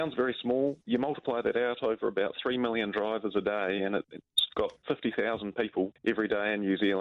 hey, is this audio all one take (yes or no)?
yes